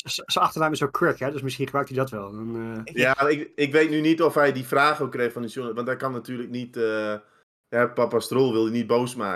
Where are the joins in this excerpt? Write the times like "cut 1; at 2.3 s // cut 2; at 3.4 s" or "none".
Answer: none